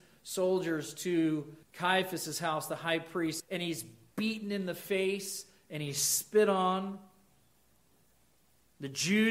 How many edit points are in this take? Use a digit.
2